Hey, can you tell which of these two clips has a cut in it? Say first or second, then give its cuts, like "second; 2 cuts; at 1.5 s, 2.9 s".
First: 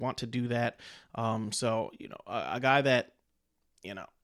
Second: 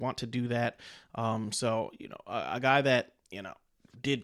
second; 1 cut; at 3.2 s